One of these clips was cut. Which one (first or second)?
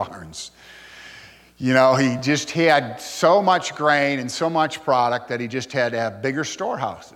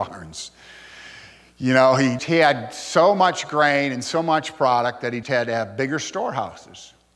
second